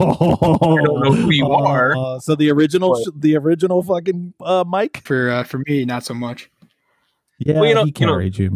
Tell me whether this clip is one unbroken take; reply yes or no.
no